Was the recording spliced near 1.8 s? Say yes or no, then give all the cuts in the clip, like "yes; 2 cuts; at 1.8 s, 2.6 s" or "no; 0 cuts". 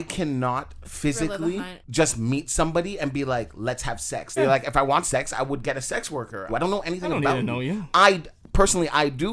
yes; 3 cuts; at 1.8 s, 4.4 s, 6.5 s